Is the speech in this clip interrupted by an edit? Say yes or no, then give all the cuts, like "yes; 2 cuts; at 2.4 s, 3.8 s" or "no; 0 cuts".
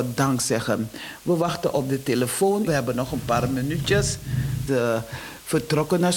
yes; 2 cuts; at 2.7 s, 4.7 s